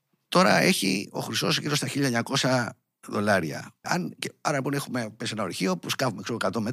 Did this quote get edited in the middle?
yes; 1 cut; at 3.8 s

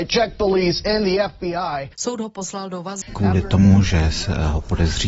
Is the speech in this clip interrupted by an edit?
yes; 2 cuts; at 1.9 s, 3.0 s

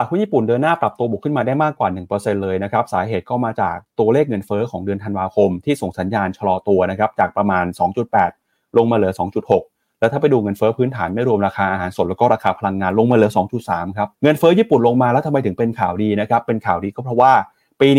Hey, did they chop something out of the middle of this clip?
yes; 1 cut; at 14.1 s

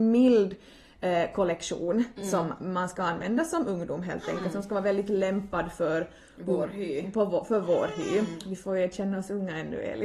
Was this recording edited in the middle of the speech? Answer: no; 0 cuts

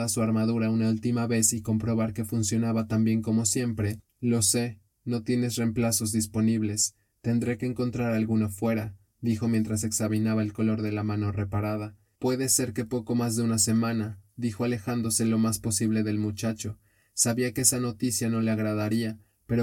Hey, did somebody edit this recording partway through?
yes; 1 cut; at 12.2 s

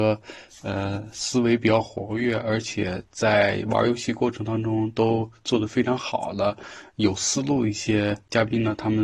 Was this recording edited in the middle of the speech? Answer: no; 0 cuts

